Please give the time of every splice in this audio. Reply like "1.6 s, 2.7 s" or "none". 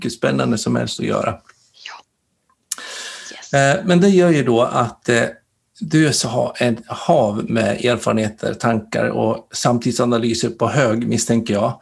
none